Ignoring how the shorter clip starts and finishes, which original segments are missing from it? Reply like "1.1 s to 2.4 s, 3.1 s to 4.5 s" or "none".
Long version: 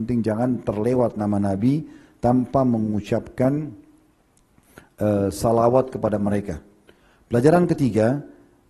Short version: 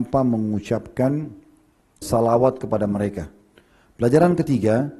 4.4 s to 5.3 s